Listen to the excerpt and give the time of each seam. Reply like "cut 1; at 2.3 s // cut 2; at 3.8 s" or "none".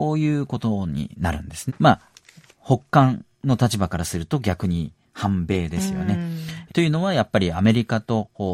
cut 1; at 1.7 s // cut 2; at 6.7 s